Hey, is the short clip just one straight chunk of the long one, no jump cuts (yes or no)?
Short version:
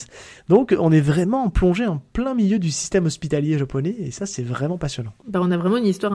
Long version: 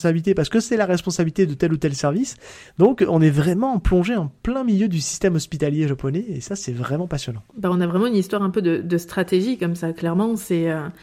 yes